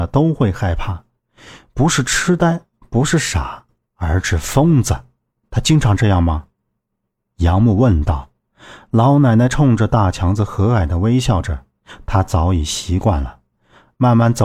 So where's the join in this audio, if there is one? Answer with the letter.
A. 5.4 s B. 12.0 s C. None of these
A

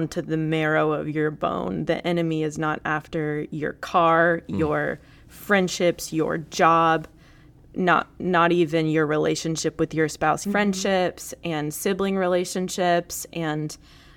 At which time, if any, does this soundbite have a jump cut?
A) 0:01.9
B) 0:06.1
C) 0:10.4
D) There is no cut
C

